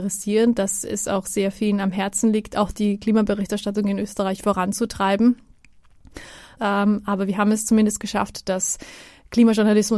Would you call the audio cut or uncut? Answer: cut